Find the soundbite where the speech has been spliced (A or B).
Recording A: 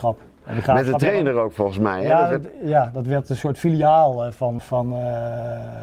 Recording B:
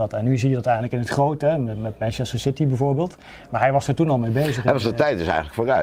A